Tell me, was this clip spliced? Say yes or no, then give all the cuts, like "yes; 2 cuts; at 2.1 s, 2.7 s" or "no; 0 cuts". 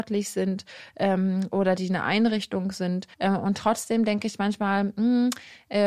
yes; 1 cut; at 3.1 s